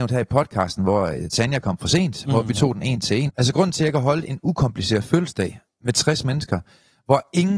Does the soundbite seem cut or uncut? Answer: cut